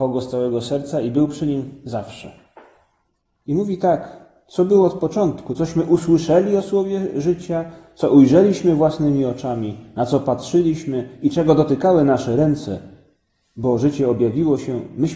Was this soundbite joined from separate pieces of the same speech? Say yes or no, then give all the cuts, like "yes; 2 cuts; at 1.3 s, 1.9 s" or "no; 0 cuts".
no; 0 cuts